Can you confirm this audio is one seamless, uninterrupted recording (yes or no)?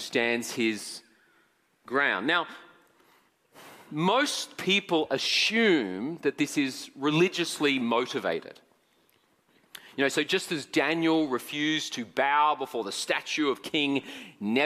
yes